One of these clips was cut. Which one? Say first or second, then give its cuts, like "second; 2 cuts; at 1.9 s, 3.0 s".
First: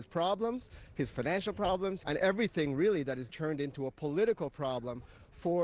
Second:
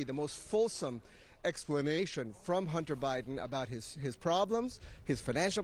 first; 2 cuts; at 2.0 s, 3.3 s